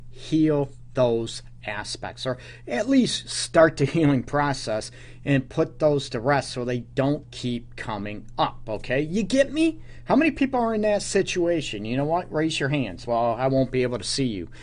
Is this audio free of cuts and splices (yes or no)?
yes